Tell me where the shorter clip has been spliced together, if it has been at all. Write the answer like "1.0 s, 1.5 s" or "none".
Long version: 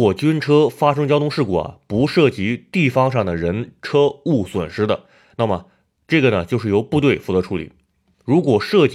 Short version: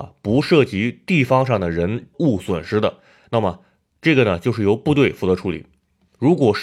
2.1 s

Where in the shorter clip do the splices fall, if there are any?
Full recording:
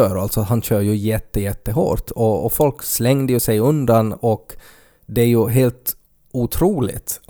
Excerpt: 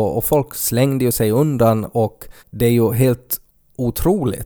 2.4 s

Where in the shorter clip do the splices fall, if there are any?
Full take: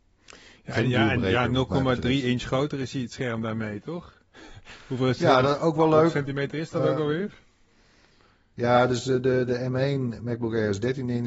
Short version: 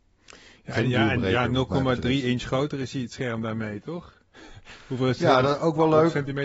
none

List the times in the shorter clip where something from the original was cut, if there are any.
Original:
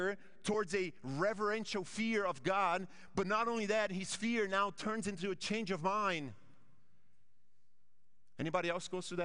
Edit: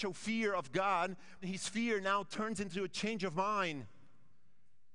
1.4 s

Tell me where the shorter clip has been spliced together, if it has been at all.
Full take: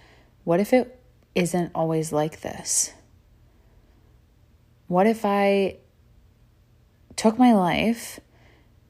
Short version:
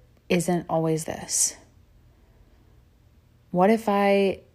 1.0 s

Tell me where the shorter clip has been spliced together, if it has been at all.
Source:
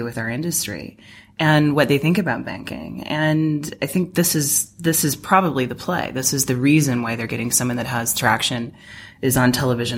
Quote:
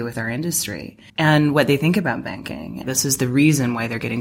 1.1 s, 2.8 s

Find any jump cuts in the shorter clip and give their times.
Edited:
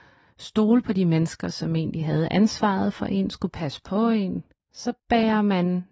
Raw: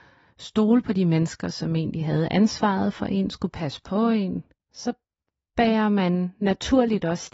5.0 s

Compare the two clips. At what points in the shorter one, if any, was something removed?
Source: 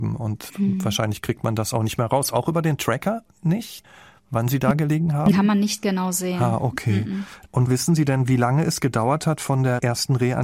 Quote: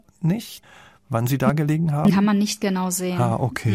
none

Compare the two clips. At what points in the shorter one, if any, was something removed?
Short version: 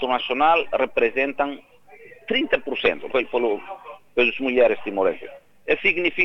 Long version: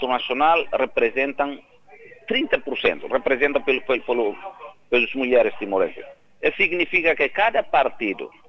3.1 s

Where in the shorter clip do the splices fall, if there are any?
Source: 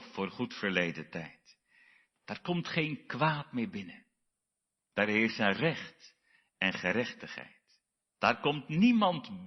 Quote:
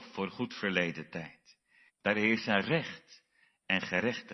1.9 s

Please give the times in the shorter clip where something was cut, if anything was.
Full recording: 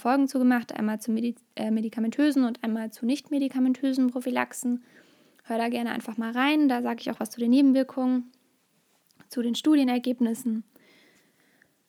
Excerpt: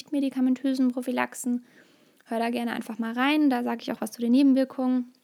none

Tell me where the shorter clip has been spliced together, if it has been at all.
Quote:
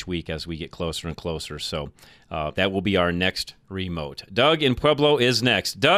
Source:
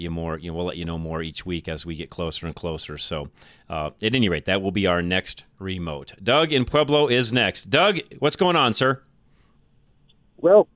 2.5 s

